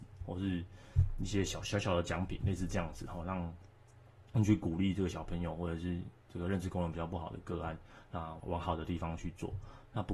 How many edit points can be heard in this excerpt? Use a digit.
1